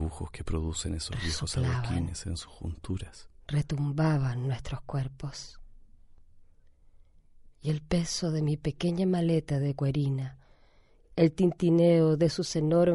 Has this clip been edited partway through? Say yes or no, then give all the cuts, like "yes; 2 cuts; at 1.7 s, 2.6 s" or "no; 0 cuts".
no; 0 cuts